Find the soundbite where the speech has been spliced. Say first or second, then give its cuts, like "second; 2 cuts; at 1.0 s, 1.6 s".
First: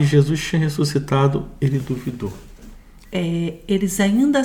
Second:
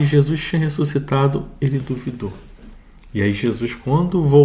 first; 1 cut; at 3.0 s